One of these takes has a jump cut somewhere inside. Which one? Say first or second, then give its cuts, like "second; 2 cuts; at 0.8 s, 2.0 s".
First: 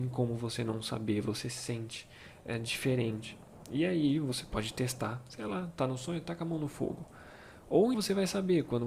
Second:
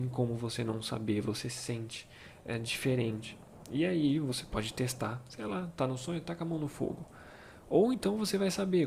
first; 1 cut; at 7.9 s